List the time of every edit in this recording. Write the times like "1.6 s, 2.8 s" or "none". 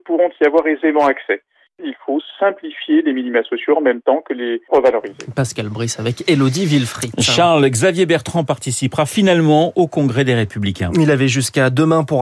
none